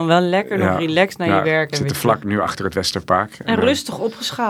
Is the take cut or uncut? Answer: uncut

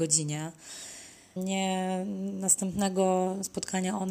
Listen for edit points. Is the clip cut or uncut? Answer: cut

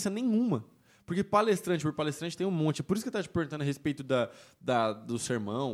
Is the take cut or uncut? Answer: uncut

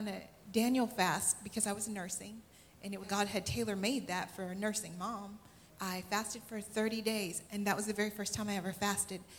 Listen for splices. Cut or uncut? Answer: cut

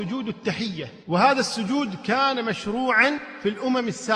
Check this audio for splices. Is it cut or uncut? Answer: cut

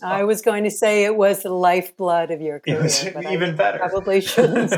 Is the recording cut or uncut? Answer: uncut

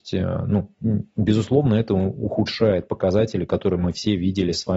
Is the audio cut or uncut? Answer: uncut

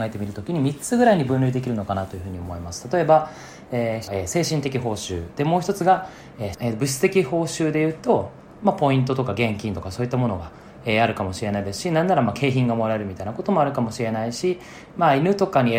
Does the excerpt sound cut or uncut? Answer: cut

